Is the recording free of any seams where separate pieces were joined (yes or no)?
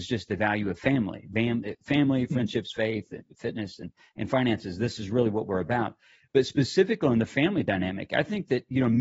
yes